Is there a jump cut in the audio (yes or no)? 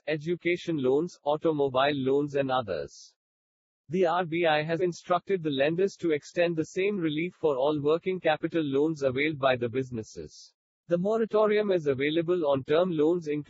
yes